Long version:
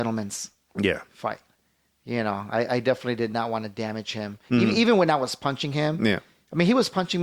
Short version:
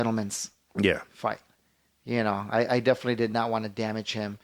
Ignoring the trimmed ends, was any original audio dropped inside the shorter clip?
no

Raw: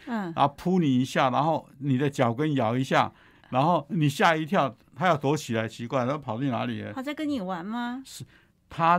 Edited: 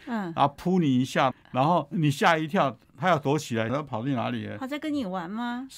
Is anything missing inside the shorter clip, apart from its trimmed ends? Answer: yes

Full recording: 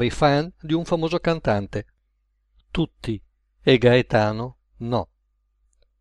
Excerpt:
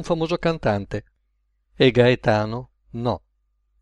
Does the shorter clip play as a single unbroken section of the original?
no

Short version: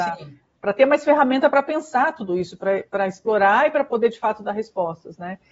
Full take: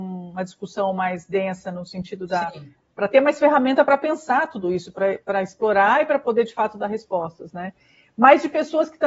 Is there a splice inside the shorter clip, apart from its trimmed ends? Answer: no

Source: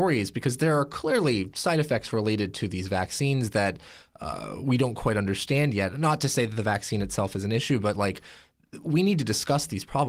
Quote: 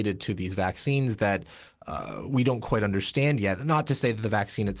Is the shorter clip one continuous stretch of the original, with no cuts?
yes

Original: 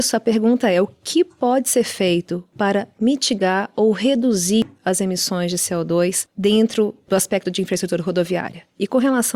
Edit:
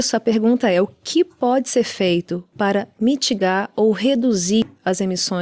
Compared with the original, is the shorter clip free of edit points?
yes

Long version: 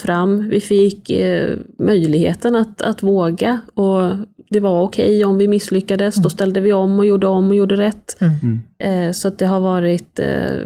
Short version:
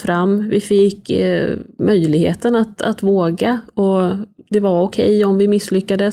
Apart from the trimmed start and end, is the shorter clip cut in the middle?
no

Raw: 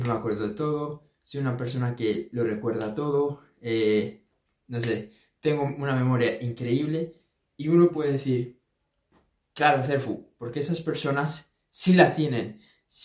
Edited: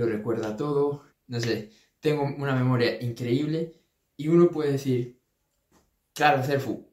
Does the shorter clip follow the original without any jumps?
no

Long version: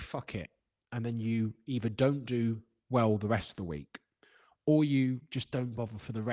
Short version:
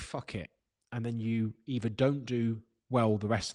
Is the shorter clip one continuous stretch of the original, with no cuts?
yes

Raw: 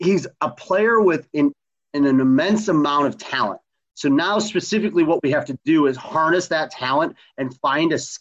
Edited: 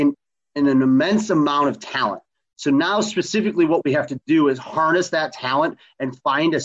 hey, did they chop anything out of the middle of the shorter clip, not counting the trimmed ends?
no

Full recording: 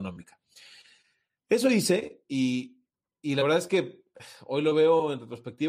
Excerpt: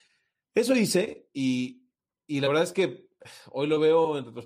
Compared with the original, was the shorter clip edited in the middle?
no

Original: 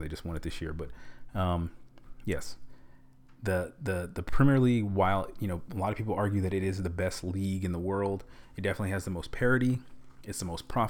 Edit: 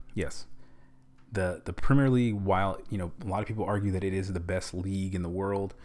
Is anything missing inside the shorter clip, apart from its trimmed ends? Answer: yes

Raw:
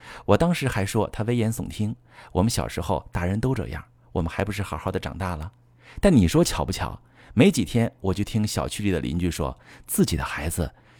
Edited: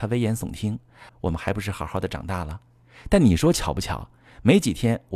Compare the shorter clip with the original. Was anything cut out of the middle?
yes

